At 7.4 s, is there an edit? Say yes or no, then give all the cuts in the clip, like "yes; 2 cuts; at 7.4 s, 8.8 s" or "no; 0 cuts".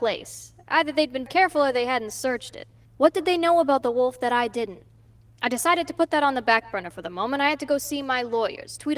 no; 2 cuts; at 1.3 s, 2.8 s